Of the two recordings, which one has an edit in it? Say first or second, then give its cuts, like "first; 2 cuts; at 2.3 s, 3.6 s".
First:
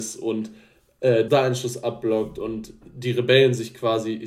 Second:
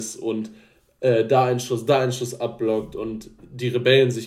first; 1 cut; at 1.3 s